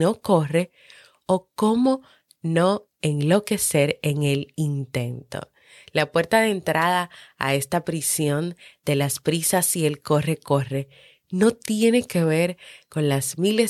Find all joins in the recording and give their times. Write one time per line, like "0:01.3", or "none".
none

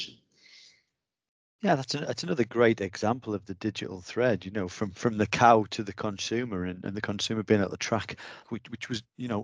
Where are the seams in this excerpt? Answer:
0:08.4

